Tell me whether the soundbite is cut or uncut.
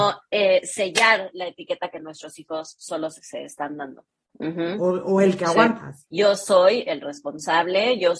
cut